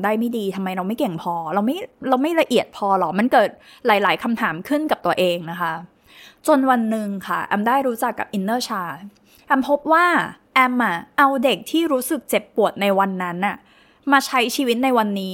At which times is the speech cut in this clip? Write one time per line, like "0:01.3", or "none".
none